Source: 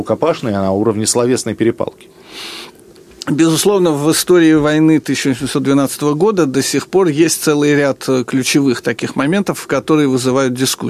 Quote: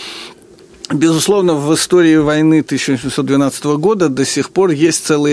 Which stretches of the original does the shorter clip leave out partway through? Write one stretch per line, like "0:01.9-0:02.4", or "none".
none

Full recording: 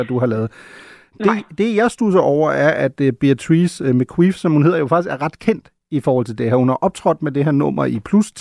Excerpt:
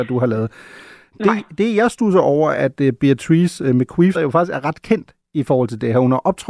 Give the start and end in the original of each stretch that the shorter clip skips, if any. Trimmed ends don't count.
0:02.5-0:02.7
0:04.3-0:04.7

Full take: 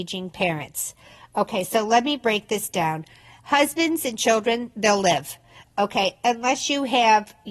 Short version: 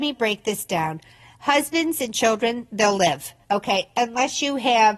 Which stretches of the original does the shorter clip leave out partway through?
0:05.5-0:05.7

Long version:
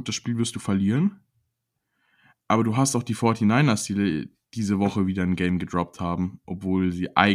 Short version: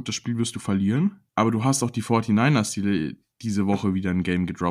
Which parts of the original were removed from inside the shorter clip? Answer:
0:01.3-0:02.4

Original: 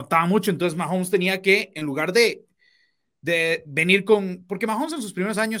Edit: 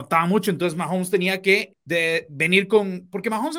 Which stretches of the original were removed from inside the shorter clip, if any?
0:01.7-0:03.1

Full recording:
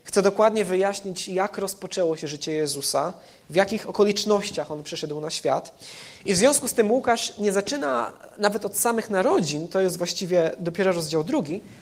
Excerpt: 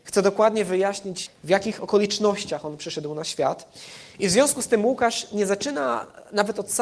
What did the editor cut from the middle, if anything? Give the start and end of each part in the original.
0:01.3-0:03.3

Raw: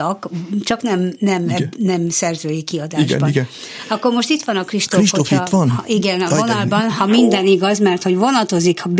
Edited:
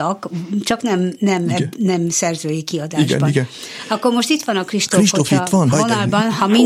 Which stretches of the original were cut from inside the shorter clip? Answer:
0:05.7-0:06.3

